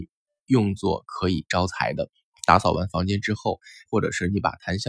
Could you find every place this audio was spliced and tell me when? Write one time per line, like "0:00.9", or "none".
0:02.3
0:03.9

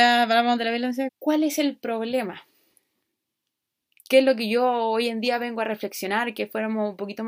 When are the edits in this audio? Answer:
0:01.1

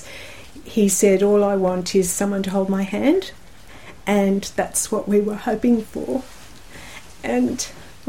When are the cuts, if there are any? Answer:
none

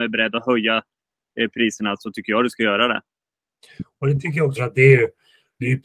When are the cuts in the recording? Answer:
0:04.6

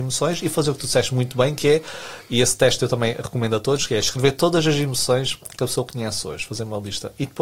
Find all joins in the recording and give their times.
none

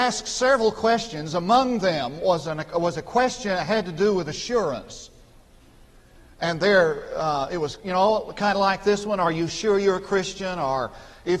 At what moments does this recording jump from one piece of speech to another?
none

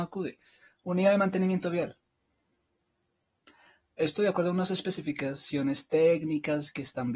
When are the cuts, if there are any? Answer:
none

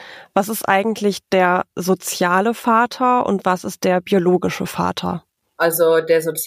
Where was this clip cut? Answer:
none

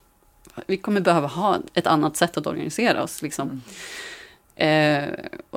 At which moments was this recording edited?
none

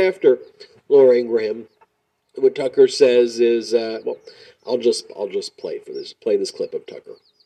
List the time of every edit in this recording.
none

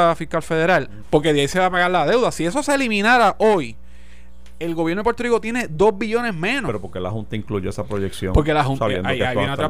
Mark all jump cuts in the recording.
0:01.0

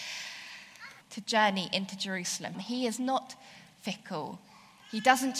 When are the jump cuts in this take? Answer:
0:01.0
0:02.5

